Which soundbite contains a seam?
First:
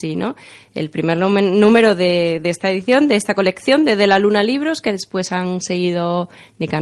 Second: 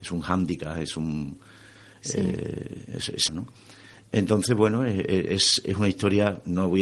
second; 1 cut; at 3.3 s

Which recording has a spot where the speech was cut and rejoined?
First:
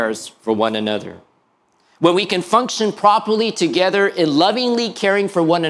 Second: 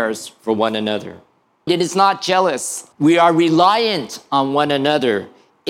second; 2 cuts; at 1.7 s, 2.9 s

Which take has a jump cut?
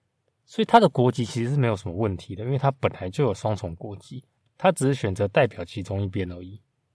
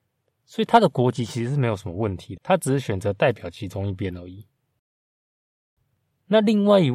second; 1 cut; at 2.4 s

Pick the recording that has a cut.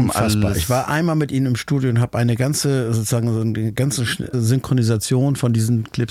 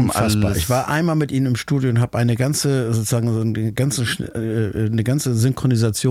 first; 1 cut; at 4.3 s

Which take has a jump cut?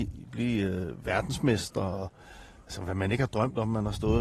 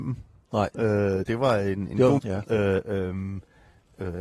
second; 1 cut; at 2.2 s

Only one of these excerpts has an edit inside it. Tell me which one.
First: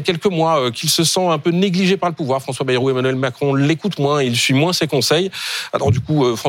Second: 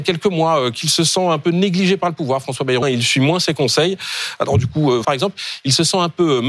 second; 2 cuts; at 2.8 s, 5.0 s

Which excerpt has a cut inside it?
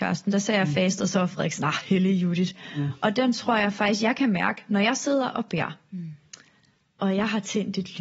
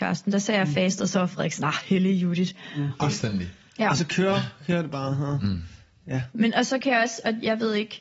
second; 2 cuts; at 3.0 s, 6.3 s

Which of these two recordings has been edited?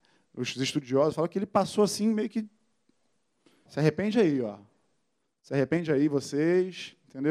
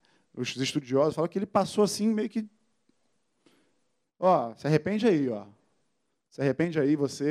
first; 1 cut; at 3.7 s

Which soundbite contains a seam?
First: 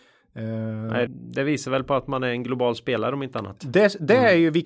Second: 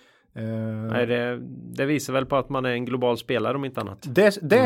first; 1 cut; at 1.1 s

